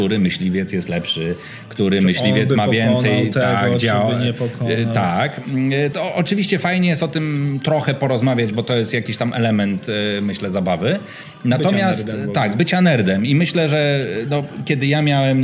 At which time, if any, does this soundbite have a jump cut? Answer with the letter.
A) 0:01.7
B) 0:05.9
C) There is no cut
B